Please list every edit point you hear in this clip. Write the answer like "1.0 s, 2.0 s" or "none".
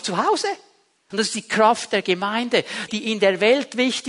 1.1 s, 2.9 s